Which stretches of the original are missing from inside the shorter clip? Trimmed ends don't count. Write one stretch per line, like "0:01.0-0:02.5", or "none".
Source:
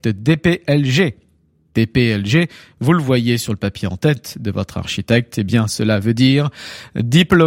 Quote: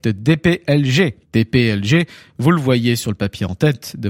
0:01.2-0:01.6